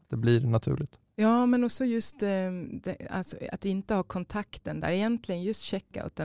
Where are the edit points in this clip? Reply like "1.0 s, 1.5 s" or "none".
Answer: none

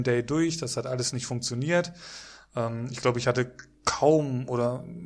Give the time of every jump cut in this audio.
none

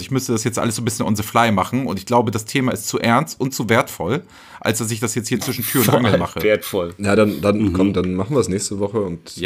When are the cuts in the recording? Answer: none

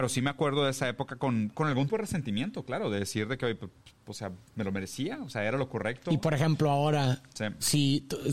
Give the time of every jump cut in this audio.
1.9 s

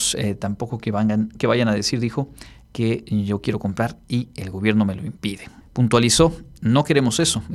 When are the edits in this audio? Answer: 5.6 s

